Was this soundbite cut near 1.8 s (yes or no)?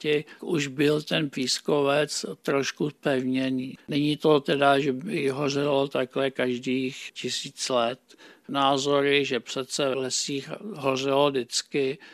no